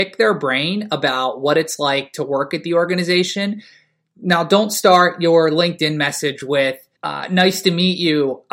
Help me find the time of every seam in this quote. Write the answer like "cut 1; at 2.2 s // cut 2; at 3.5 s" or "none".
cut 1; at 7.0 s